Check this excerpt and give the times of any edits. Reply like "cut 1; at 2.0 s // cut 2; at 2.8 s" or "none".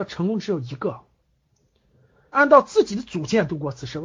cut 1; at 2.3 s